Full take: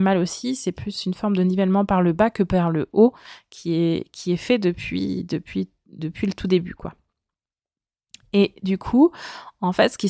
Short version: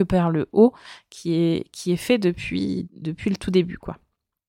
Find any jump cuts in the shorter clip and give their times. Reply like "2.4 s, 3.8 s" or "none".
2.9 s